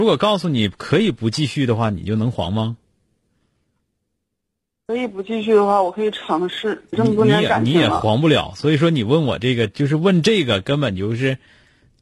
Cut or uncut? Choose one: cut